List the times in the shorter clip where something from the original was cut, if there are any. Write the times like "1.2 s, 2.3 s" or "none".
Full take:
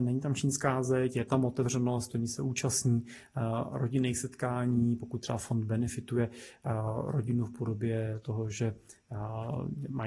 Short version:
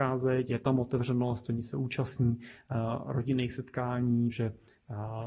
4.3 s